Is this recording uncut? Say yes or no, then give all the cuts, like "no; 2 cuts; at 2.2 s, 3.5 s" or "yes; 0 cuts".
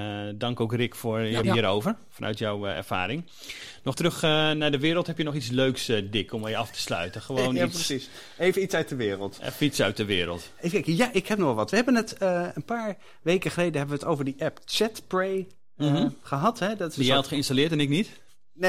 no; 2 cuts; at 1.4 s, 3.9 s